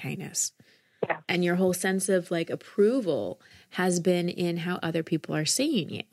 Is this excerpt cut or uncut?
uncut